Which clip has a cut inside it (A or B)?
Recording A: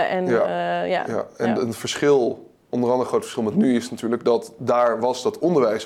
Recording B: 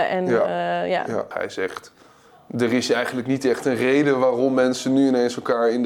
B